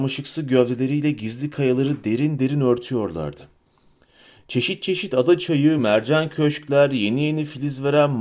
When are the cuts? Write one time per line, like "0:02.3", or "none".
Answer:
none